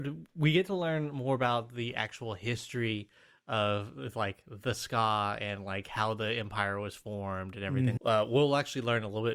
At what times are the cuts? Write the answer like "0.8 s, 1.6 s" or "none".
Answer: 8.0 s